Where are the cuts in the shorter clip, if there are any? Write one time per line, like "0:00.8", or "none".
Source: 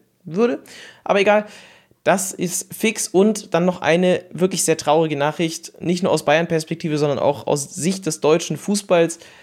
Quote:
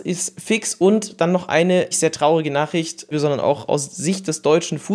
0:01.9
0:03.1